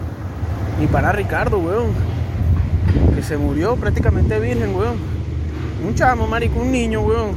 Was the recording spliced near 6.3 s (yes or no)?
no